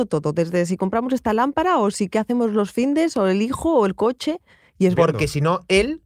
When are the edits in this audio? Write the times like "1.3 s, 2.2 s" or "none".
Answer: 5.0 s